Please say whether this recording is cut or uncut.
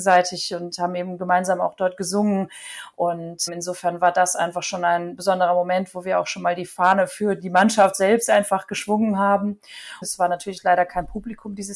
cut